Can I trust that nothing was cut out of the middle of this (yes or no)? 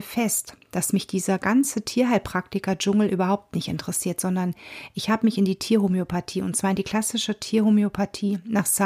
yes